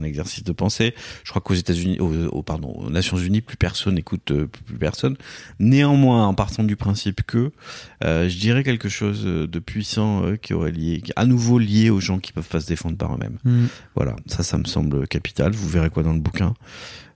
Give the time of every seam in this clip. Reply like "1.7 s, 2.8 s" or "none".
none